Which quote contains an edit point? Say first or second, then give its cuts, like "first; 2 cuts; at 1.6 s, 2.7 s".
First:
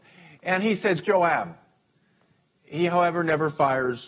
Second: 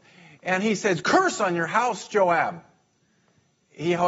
first; 1 cut; at 1.0 s